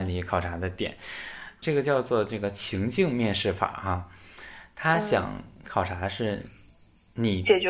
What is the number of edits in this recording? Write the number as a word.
zero